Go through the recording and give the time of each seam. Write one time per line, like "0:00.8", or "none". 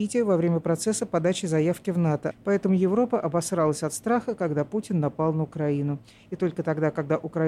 0:02.3